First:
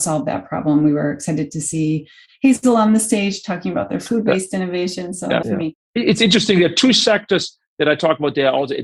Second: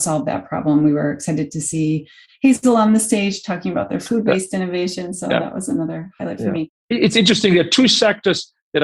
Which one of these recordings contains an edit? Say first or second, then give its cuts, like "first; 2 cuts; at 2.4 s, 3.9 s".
first; 1 cut; at 5.4 s